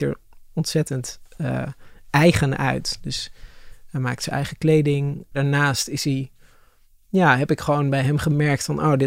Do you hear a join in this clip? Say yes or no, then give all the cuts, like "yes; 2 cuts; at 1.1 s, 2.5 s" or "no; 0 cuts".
yes; 1 cut; at 5.3 s